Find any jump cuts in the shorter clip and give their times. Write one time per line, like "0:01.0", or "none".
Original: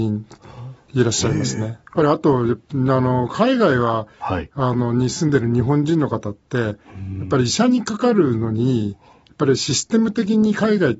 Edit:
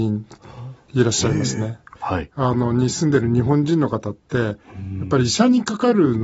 0:02.0